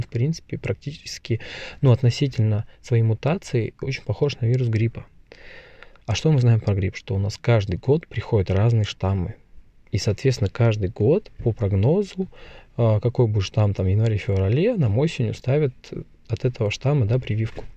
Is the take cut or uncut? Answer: uncut